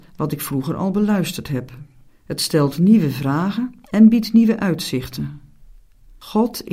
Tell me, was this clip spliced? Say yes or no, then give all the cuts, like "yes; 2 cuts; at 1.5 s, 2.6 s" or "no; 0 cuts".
yes; 2 cuts; at 2.1 s, 3.8 s